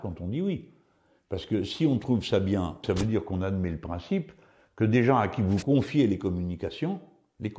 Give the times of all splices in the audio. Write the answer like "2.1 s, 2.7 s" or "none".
2.8 s